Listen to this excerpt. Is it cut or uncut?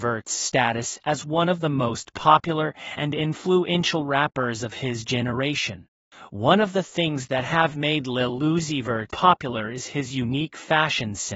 cut